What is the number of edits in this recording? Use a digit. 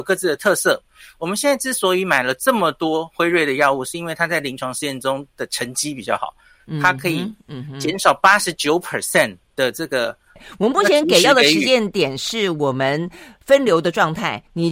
1